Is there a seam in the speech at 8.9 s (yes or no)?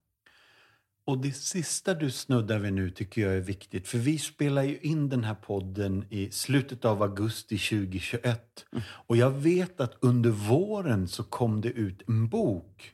no